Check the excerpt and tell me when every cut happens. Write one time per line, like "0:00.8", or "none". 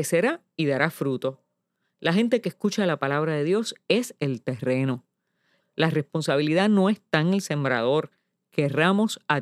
0:05.6